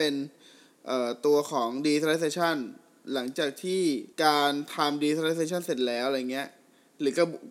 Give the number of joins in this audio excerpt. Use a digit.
1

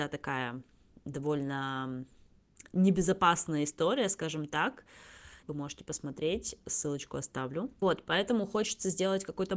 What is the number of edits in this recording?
1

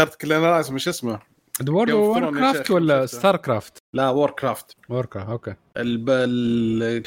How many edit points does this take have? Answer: 0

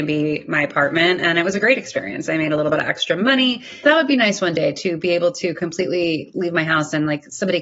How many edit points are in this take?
1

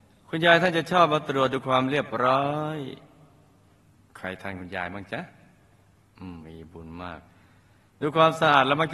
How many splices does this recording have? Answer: 1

